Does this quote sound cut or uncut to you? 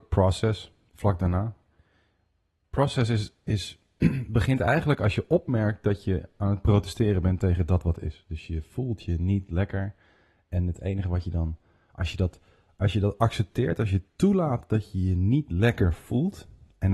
uncut